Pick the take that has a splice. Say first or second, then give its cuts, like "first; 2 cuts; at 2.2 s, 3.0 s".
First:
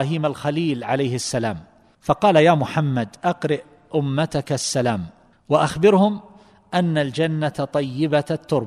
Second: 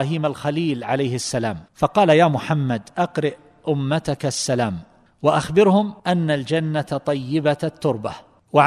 second; 2 cuts; at 1.7 s, 6.0 s